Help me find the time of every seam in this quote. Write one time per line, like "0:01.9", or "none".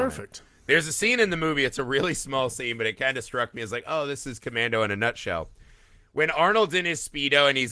none